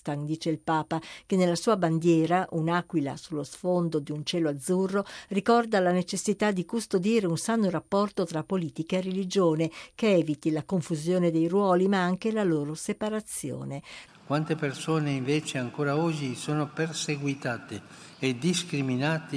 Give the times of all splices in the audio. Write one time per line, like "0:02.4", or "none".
0:14.1